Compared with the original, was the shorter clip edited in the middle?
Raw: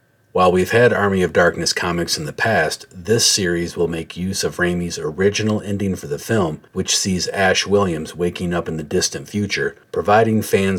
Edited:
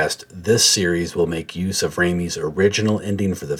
no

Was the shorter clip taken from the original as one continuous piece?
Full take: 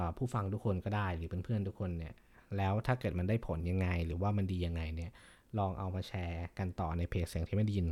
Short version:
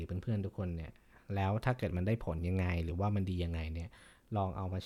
yes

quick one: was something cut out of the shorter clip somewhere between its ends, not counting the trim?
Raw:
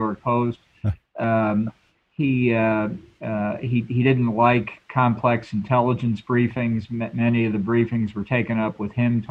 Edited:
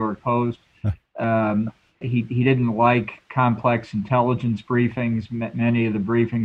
yes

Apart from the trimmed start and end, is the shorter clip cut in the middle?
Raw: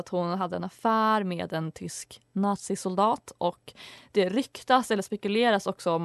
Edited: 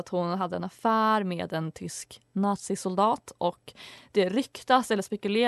no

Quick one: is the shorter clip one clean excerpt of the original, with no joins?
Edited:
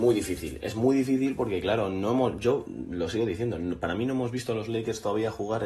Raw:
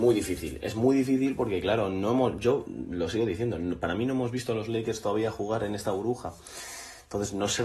yes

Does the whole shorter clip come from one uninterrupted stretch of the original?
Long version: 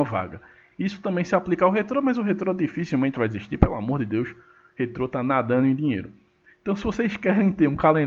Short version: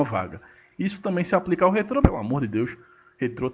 no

